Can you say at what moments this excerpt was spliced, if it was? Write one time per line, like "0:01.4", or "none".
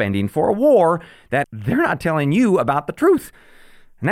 0:01.4